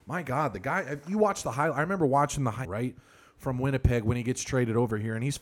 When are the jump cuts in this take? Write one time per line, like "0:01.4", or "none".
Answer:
0:02.6